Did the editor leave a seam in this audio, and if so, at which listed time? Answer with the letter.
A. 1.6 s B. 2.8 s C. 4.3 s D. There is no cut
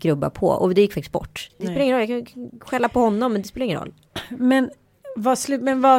A